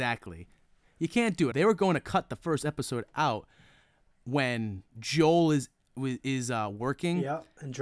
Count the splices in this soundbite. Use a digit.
1